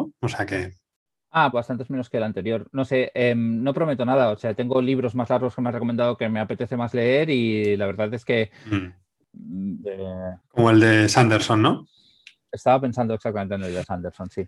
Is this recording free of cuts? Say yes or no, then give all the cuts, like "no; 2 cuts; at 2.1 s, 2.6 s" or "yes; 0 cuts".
no; 2 cuts; at 1.5 s, 9.8 s